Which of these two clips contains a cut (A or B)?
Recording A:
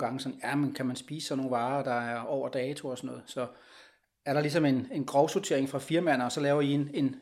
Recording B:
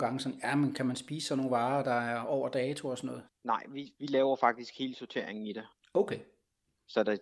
B